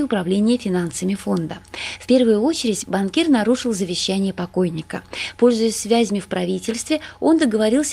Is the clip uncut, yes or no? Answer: yes